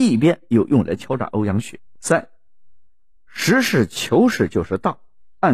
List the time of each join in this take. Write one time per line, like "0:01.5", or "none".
0:02.0